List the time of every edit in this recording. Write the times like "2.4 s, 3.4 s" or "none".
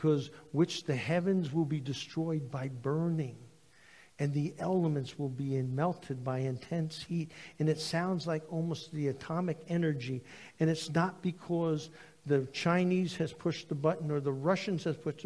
none